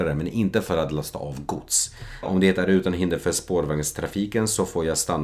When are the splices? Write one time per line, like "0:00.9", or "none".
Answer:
0:02.2